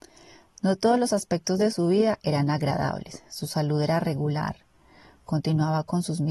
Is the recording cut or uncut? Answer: uncut